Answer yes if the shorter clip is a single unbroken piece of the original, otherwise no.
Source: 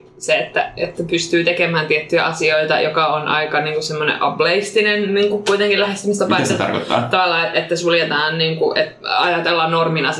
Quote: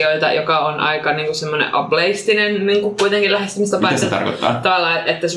yes